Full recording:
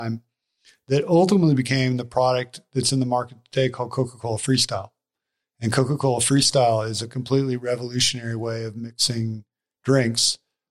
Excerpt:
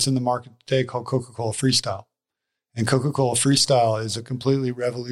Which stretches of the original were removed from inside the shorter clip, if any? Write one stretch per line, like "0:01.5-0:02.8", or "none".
none